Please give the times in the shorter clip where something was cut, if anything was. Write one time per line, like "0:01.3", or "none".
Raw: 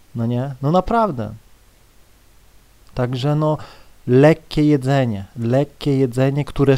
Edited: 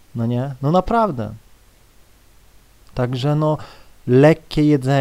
none